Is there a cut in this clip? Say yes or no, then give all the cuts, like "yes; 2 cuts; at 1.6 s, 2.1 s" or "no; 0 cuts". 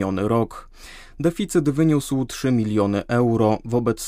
no; 0 cuts